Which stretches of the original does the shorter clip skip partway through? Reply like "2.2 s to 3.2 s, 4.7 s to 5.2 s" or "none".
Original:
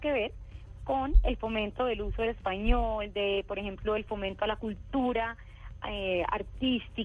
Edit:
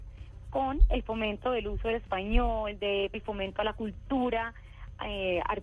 3.5 s to 4.0 s